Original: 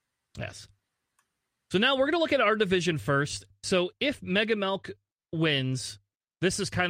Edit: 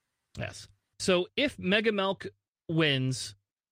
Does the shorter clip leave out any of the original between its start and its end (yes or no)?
yes